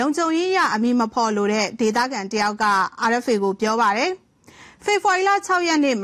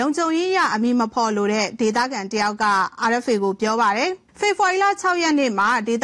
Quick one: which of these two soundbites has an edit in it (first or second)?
second